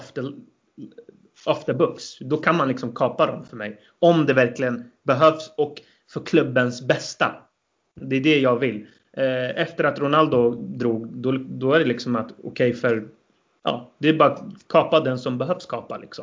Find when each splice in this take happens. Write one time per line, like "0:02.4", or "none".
none